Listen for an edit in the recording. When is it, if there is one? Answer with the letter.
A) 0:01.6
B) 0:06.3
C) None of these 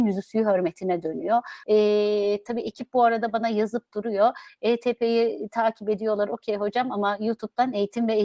A